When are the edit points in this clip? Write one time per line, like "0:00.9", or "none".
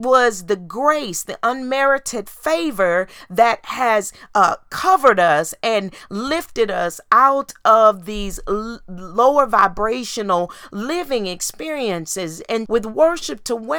0:12.7